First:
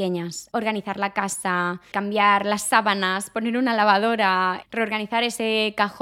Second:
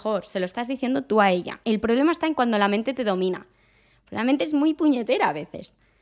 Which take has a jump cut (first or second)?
first